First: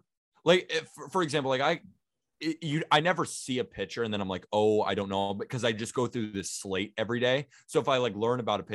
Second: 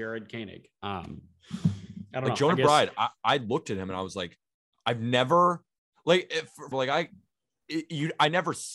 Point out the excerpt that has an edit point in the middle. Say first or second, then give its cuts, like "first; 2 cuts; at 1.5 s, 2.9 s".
second; 1 cut; at 6.7 s